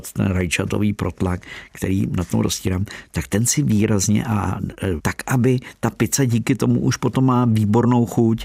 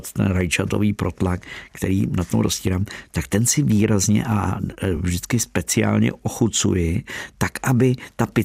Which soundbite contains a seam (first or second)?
first